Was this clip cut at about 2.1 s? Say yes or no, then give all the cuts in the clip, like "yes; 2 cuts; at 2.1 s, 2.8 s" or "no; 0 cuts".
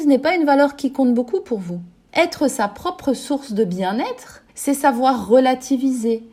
yes; 2 cuts; at 2.1 s, 4.5 s